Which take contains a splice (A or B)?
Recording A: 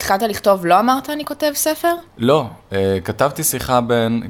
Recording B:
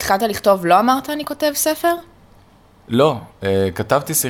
A